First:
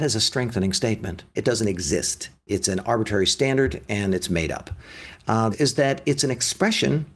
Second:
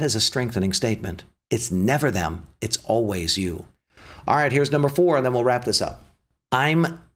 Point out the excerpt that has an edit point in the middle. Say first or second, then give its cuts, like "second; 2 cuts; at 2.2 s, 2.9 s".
first; 2 cuts; at 1.3 s, 5.5 s